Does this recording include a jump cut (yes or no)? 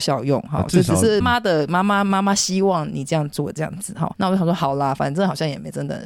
yes